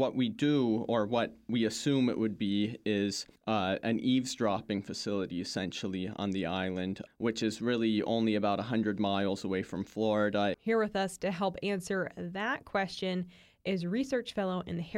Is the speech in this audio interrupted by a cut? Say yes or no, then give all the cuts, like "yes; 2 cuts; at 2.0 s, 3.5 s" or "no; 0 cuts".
yes; 3 cuts; at 3.4 s, 7.1 s, 10.5 s